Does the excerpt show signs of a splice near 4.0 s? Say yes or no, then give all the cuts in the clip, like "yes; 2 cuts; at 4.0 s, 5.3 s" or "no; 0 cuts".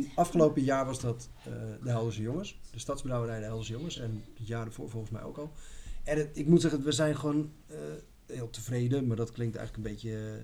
no; 0 cuts